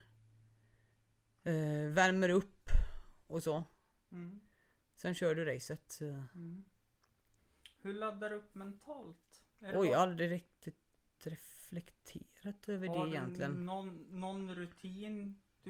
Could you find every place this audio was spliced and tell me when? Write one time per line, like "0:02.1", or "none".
0:09.5

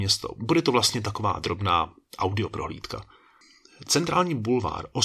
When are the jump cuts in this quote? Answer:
none

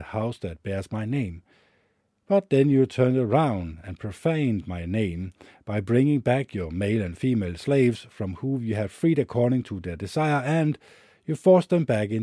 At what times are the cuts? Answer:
none

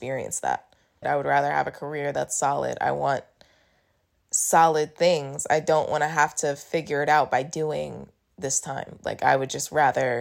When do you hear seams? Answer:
0:01.0

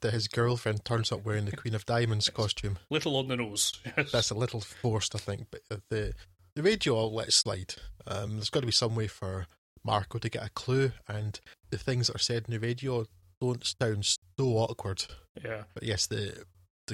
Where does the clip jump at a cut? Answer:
none

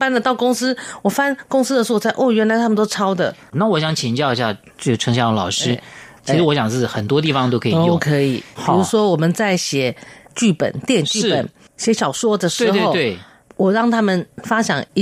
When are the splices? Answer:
0:06.2

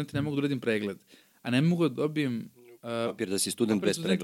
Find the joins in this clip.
none

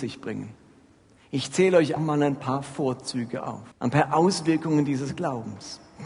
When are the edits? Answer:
0:02.0
0:03.7

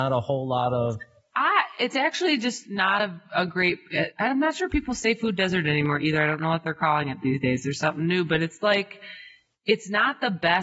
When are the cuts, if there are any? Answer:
none

